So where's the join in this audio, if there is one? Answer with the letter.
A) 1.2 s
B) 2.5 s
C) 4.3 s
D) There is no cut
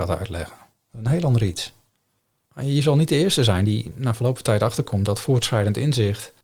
B